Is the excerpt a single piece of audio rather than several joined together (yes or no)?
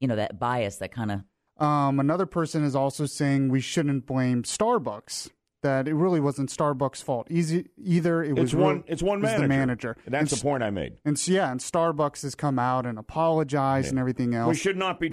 no